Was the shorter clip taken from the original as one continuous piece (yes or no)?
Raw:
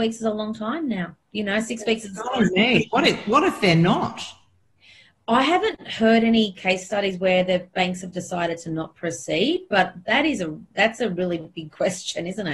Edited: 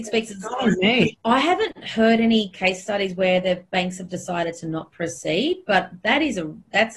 no